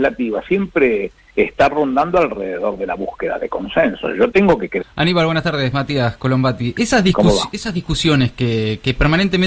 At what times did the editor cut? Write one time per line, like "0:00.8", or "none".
0:04.8